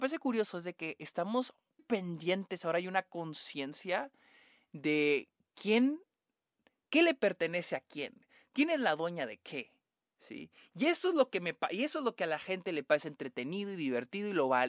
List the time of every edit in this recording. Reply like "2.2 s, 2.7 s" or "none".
1.8 s